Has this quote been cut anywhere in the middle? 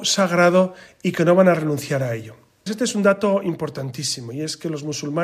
yes; 1 cut; at 2.7 s

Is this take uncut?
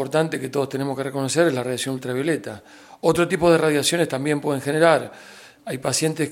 yes; 0 cuts

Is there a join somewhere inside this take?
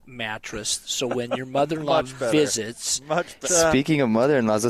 yes; 1 cut; at 3.4 s

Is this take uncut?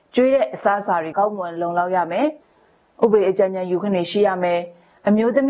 no; 2 cuts; at 1.1 s, 2.4 s

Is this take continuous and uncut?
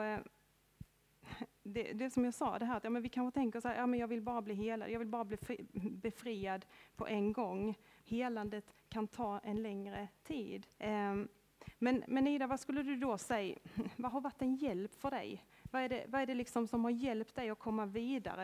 no; 2 cuts; at 8.0 s, 10.8 s

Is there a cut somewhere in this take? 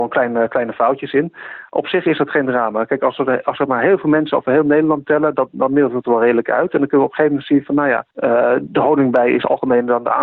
yes; 1 cut; at 8.1 s

